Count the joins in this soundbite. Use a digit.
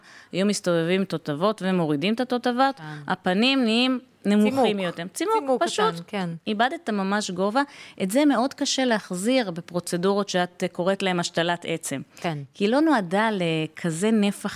0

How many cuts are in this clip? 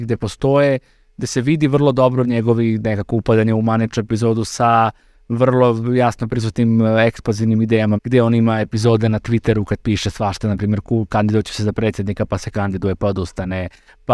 1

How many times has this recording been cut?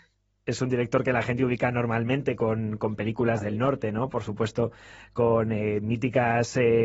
0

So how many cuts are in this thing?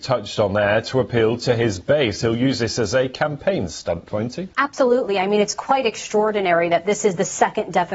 1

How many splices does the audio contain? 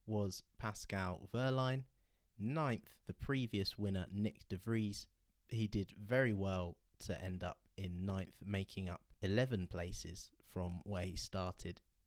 0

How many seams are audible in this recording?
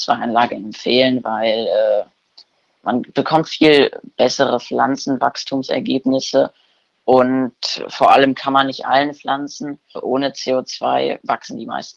1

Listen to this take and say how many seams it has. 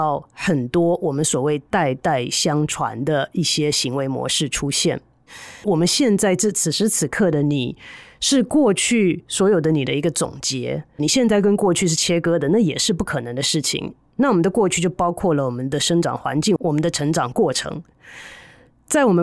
3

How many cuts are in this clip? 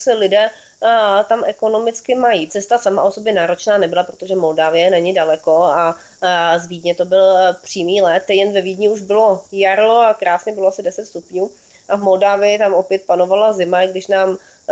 1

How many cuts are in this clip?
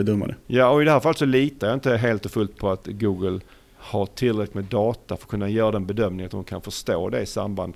0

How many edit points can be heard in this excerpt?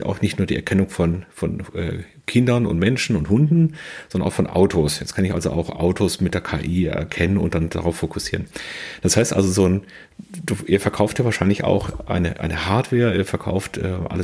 0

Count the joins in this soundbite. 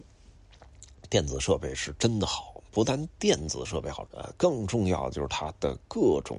1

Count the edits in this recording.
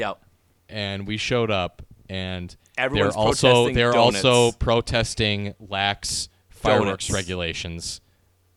0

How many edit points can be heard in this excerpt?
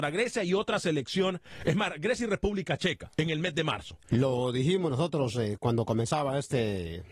1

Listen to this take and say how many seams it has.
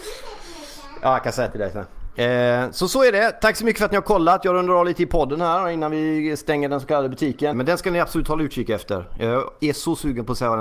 1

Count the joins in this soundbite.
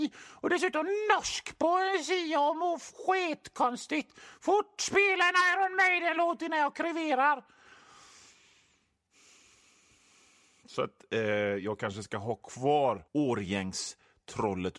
1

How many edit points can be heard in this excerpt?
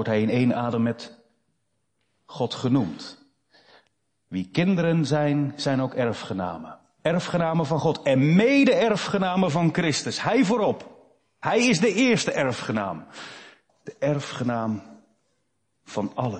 1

